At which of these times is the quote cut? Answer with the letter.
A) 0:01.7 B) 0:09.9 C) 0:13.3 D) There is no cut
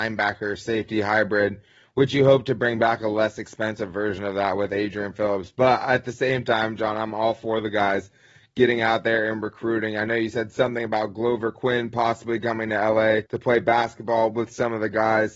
C